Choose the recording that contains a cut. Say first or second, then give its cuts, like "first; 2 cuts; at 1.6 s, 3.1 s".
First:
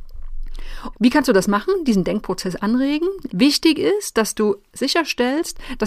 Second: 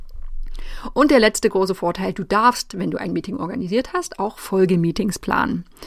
first; 2 cuts; at 0.9 s, 3.3 s